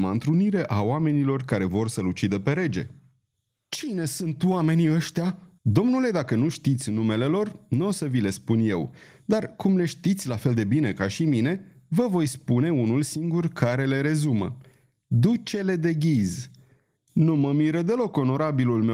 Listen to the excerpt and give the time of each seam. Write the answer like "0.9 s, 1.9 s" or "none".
5.6 s, 17.0 s

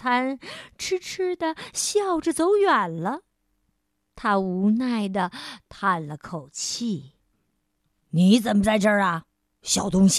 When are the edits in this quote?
none

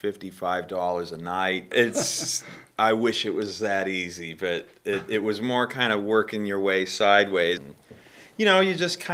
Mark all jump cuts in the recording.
1.7 s, 7.6 s

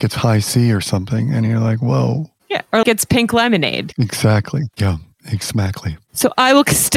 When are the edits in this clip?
2.8 s, 4.7 s

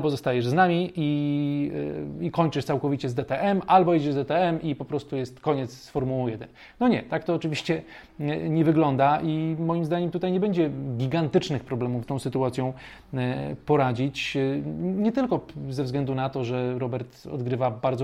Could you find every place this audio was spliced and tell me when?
12.0 s

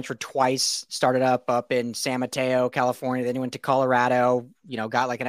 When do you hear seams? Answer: none

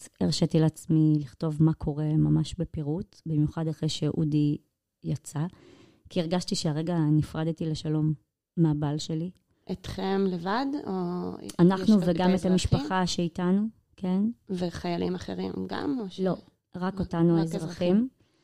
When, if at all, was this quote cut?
9.5 s

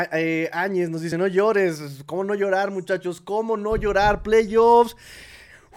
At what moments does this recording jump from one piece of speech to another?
none

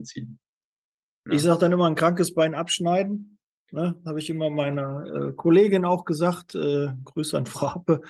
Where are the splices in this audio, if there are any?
none

